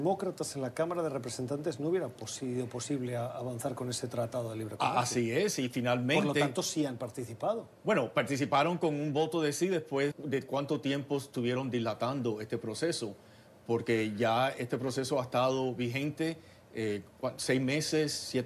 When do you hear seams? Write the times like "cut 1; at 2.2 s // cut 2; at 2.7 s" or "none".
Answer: cut 1; at 10.1 s